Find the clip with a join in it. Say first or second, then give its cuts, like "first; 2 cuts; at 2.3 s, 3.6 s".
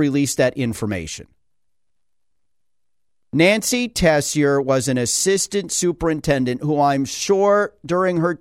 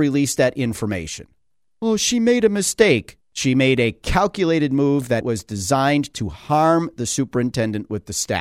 second; 3 cuts; at 1.7 s, 3.2 s, 5.2 s